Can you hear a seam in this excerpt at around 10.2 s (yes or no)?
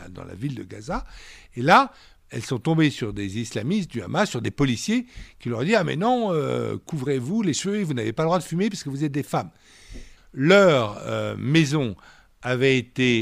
yes